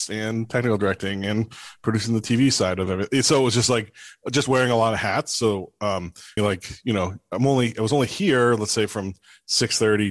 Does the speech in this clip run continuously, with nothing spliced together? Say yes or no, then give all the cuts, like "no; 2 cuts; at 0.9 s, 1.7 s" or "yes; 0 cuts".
no; 1 cut; at 6.4 s